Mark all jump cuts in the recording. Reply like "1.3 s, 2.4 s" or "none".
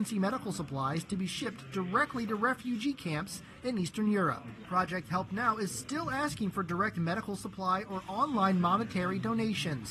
none